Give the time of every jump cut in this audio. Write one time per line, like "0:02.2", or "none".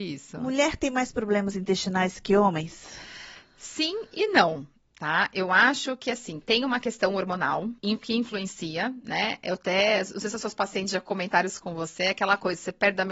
0:07.8